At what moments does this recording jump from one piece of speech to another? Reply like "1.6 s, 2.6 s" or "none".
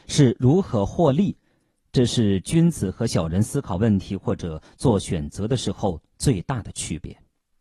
none